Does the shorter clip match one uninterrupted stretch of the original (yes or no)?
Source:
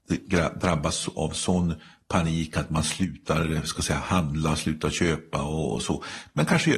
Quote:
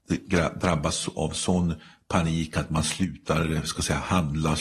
yes